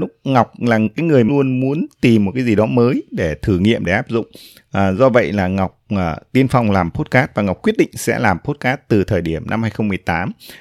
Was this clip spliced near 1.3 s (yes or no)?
yes